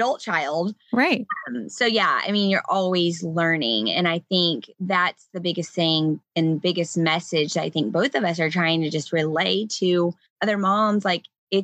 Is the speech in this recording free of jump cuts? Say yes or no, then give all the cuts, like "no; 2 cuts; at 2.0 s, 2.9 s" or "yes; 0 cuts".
yes; 0 cuts